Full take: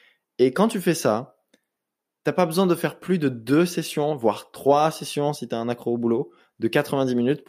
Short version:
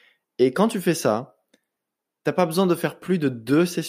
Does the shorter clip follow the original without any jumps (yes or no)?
yes